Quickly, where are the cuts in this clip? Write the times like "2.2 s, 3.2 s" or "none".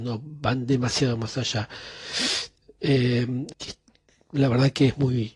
3.5 s